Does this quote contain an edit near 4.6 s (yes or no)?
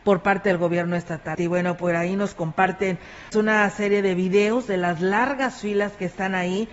no